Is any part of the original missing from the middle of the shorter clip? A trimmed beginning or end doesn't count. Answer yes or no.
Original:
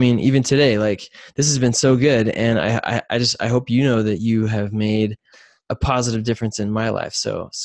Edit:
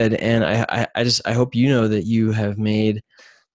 no